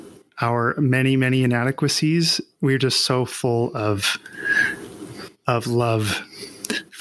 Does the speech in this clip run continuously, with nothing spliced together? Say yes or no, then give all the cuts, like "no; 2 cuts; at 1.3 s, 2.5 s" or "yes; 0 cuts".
yes; 0 cuts